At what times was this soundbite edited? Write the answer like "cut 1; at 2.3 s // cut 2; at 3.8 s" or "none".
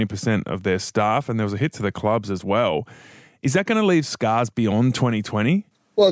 none